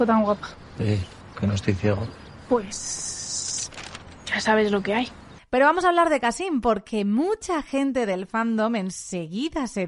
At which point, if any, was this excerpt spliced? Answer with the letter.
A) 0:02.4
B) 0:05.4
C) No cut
B